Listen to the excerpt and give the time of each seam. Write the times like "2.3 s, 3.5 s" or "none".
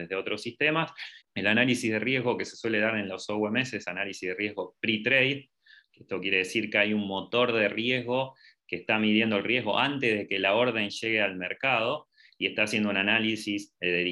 1.2 s